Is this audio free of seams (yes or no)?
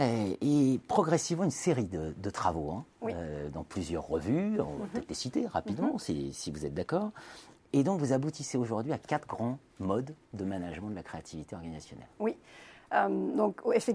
yes